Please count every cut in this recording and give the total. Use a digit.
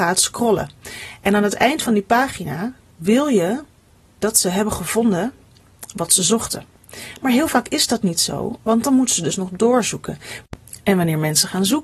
0